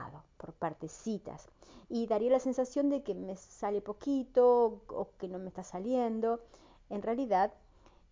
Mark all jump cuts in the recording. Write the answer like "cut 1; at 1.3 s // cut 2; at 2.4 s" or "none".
none